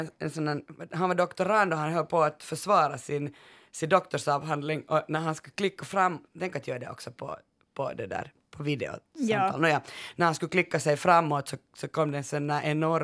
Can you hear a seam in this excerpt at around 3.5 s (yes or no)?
no